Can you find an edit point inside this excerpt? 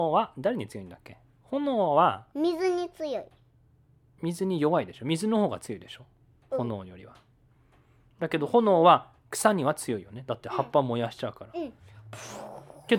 no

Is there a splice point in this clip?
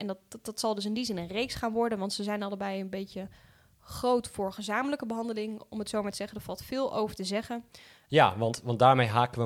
yes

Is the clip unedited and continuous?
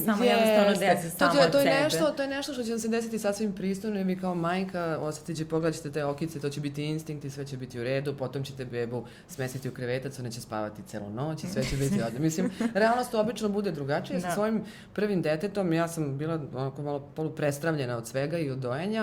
yes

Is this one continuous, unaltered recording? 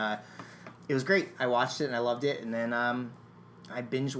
yes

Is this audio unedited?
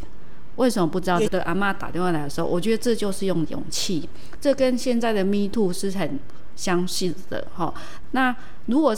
no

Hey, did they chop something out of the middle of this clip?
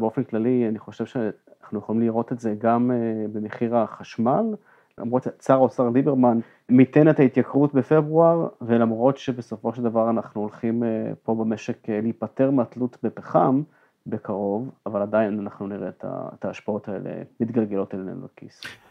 no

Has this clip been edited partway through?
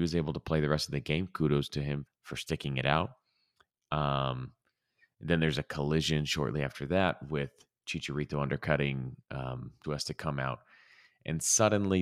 yes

